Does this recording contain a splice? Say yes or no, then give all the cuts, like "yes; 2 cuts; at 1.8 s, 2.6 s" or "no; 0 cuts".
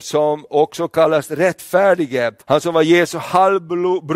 yes; 1 cut; at 2.4 s